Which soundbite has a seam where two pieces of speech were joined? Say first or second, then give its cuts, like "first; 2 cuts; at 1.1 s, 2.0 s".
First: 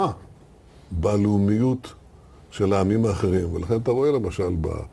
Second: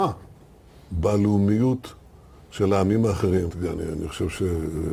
second; 1 cut; at 3.5 s